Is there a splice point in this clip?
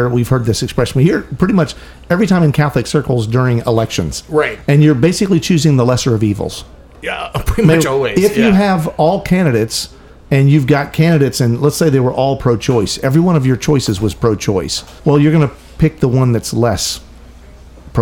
yes; 1 cut; at 15.0 s

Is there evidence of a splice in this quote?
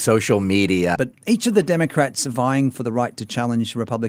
yes; 1 cut; at 1.0 s

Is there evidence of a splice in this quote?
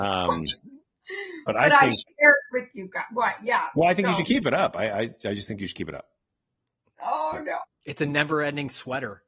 yes; 1 cut; at 7.6 s

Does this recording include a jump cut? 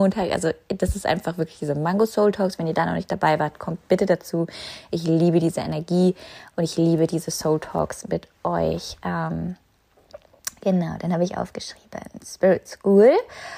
no; 0 cuts

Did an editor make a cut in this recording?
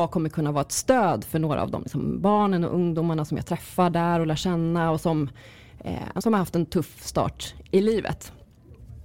yes; 1 cut; at 6.2 s

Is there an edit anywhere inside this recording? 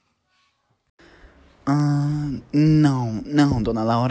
no; 0 cuts

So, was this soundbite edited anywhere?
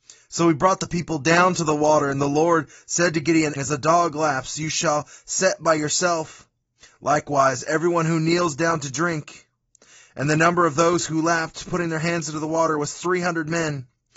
yes; 1 cut; at 3.6 s

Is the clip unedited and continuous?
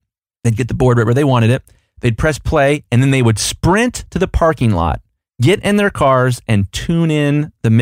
yes; 0 cuts

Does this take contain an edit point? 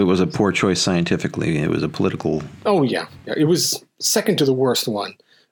no; 0 cuts

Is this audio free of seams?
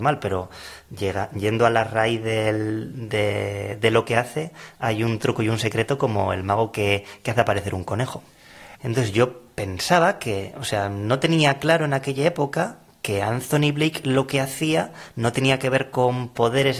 no; 1 cut; at 8.7 s

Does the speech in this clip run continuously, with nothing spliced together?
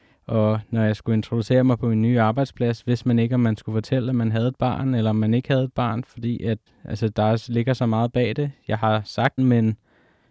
no; 2 cuts; at 6.7 s, 9.4 s

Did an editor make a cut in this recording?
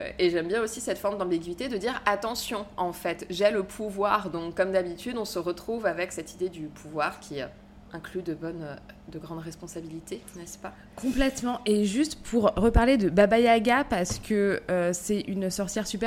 no; 0 cuts

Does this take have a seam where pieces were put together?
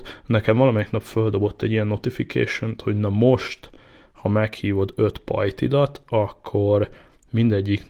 no; 0 cuts

